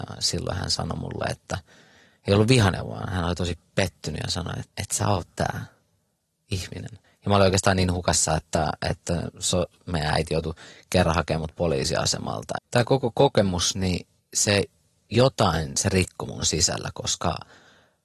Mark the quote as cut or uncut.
cut